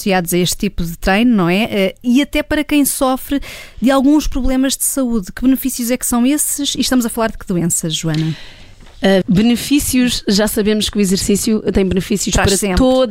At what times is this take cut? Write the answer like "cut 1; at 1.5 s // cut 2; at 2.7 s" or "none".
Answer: cut 1; at 9.2 s